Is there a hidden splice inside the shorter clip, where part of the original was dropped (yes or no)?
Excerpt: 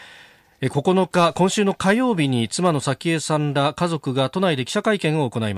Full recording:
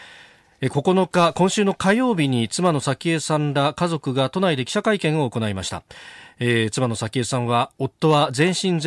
no